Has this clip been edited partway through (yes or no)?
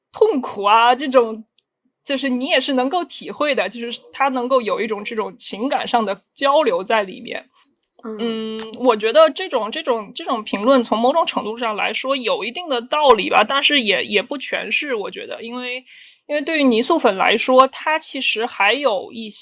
no